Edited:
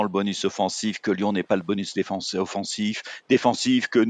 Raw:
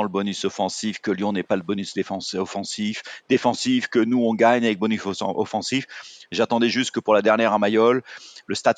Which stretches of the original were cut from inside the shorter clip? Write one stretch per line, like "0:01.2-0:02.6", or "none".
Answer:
none